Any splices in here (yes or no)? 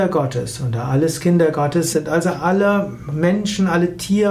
yes